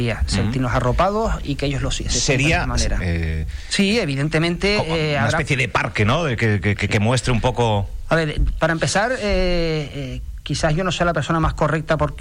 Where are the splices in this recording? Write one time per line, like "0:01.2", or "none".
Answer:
0:03.0